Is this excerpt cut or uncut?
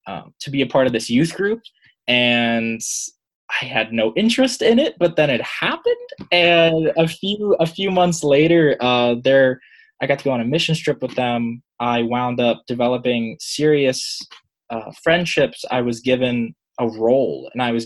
uncut